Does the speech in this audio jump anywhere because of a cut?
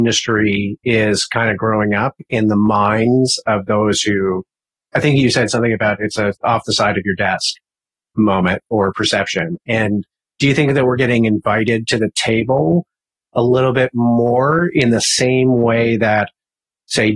no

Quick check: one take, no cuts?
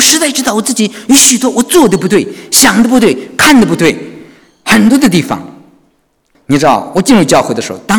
no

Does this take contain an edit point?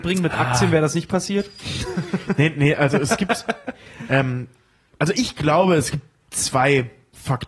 no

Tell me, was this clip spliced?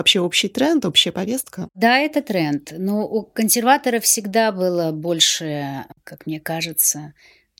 no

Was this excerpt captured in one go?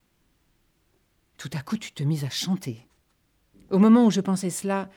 no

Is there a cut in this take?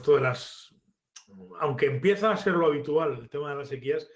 no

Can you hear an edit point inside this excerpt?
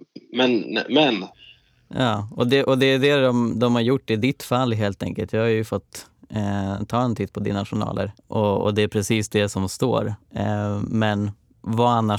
yes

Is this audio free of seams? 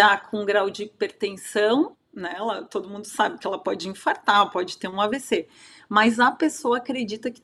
no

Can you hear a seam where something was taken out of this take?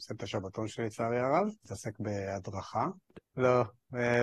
yes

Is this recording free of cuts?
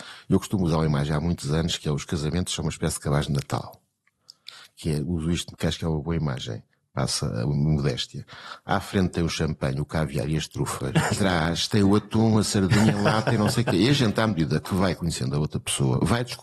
no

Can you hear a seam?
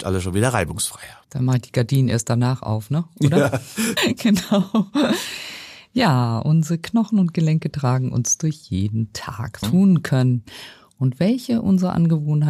yes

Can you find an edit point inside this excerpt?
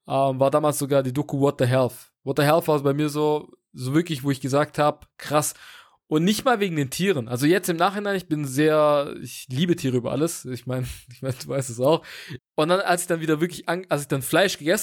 yes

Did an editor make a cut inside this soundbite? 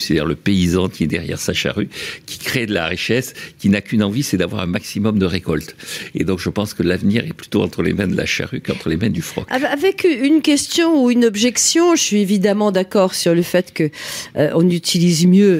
no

